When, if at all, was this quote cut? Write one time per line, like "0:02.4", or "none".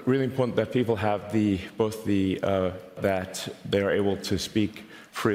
0:03.0